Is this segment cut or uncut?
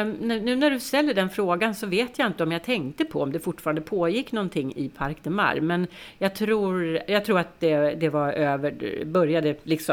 uncut